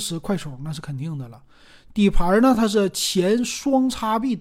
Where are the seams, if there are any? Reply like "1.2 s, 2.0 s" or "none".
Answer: none